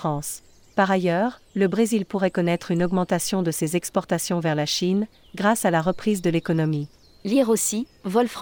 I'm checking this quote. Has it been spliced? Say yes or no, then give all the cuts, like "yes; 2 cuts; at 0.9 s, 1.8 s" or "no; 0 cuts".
no; 0 cuts